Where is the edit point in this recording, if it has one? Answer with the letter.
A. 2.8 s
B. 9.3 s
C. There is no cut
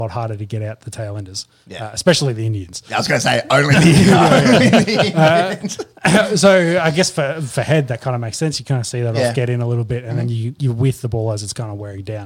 C